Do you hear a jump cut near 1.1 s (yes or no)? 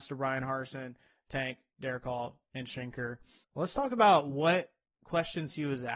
no